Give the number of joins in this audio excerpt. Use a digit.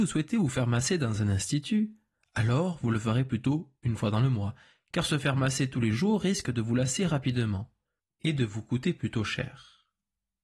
0